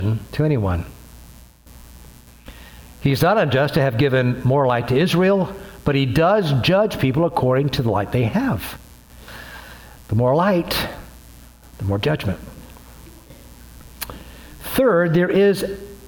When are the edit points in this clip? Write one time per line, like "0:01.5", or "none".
none

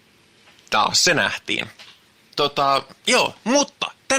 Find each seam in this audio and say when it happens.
0:02.2

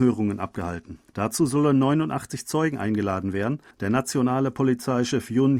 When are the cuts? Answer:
0:01.1
0:03.7

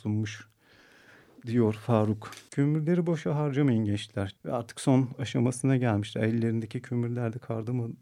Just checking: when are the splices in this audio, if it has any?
0:02.5
0:04.4

